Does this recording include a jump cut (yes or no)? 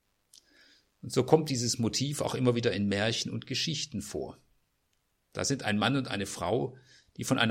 no